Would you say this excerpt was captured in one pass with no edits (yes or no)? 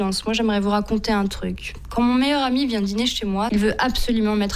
no